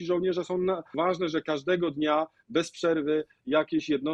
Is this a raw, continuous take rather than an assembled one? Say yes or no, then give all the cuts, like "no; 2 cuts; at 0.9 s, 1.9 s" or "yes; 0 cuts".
no; 1 cut; at 0.9 s